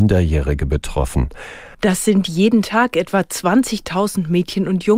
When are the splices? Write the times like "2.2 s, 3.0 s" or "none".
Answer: 1.7 s